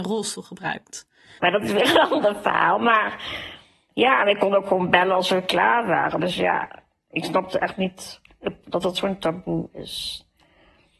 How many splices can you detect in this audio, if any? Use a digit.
1